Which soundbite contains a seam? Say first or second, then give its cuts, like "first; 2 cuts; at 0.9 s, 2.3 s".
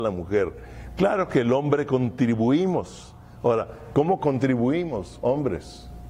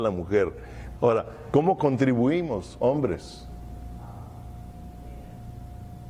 second; 1 cut; at 0.9 s